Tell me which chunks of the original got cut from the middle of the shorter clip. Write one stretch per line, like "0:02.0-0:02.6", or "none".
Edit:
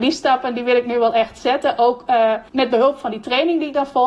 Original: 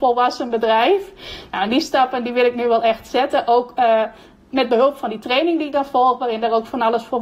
0:04.2-0:04.5